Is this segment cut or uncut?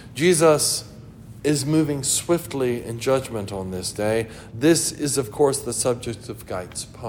cut